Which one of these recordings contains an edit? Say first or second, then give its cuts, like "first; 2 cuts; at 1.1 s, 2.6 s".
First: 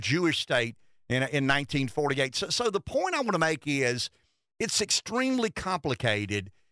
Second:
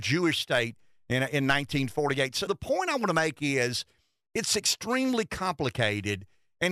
second; 1 cut; at 2.5 s